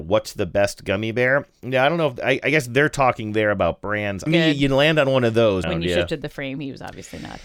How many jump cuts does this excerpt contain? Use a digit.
2